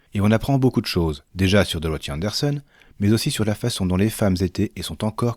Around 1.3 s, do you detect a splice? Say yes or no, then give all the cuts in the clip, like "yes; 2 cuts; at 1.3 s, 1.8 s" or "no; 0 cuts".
yes; 1 cut; at 1.3 s